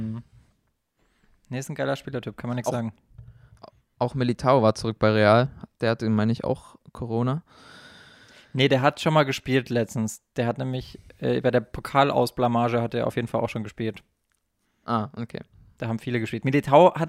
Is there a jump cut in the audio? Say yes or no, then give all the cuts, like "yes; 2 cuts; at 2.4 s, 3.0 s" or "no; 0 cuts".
no; 0 cuts